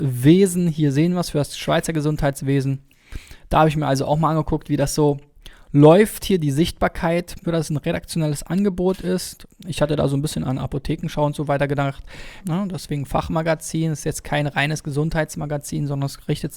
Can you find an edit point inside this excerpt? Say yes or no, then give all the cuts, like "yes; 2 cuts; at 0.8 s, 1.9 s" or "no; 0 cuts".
yes; 2 cuts; at 7.4 s, 12.4 s